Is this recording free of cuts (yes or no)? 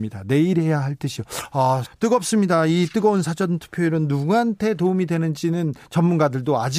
no